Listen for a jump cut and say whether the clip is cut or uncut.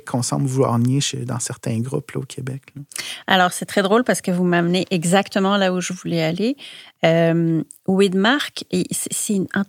uncut